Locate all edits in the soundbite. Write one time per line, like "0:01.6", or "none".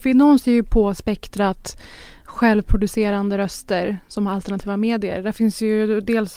none